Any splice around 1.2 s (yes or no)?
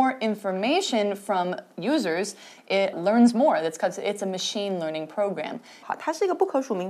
no